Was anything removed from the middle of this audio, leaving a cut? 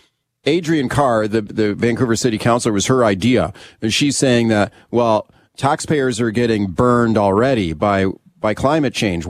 no; 0 cuts

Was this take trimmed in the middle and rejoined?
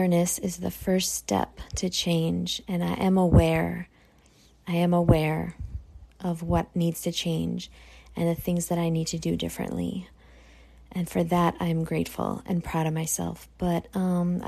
no; 0 cuts

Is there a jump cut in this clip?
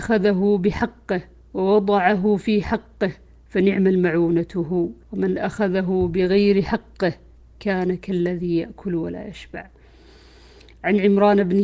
yes; 1 cut; at 5.0 s

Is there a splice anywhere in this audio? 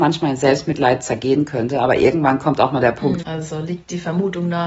yes; 1 cut; at 3.2 s

